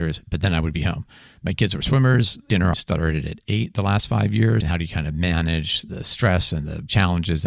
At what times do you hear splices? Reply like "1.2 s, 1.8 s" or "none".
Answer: 2.7 s, 4.6 s